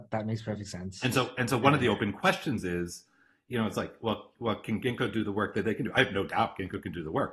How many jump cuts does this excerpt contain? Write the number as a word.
zero